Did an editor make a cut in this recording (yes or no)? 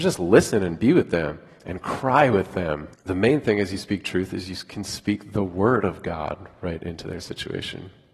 yes